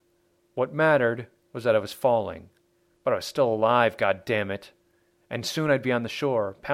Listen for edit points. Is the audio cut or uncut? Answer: uncut